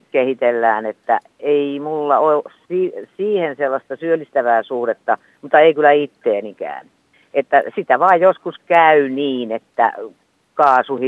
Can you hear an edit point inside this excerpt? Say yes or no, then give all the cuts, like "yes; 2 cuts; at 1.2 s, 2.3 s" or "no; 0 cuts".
no; 0 cuts